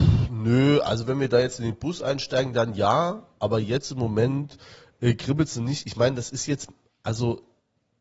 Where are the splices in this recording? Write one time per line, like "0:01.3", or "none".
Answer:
none